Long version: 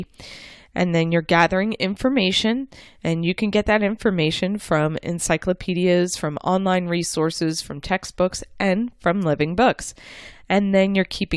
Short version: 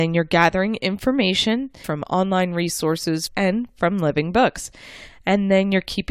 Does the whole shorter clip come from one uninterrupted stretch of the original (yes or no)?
no